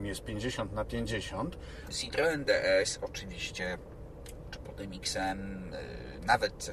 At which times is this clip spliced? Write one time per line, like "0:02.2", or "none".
0:01.9